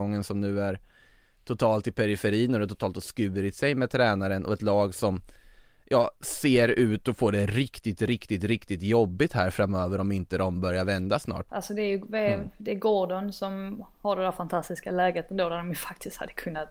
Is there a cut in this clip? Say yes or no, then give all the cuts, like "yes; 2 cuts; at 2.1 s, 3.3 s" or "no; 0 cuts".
yes; 1 cut; at 11.5 s